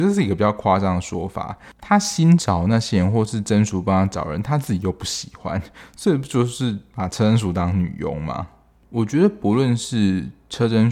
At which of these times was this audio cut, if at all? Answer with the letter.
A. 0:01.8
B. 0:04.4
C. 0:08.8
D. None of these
A